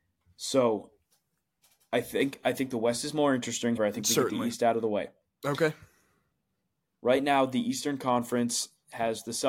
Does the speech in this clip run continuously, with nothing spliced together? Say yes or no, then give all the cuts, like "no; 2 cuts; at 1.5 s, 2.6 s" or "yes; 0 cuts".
no; 1 cut; at 3.8 s